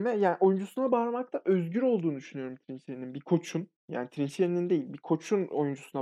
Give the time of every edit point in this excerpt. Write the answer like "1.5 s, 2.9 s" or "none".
none